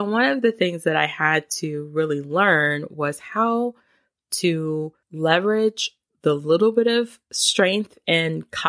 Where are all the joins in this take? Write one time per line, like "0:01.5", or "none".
0:05.0